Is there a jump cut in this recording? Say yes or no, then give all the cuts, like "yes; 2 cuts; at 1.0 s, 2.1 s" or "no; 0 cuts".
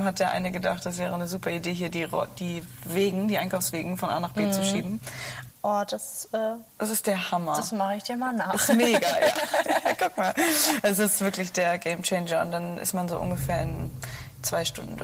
yes; 1 cut; at 5.5 s